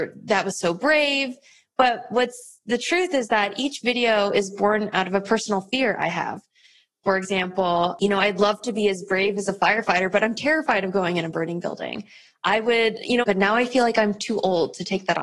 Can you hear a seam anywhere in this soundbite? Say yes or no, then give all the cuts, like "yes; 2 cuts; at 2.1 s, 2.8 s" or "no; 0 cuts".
yes; 1 cut; at 13.2 s